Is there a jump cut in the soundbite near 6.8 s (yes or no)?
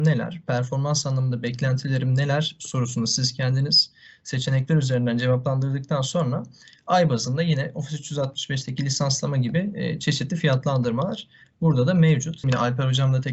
no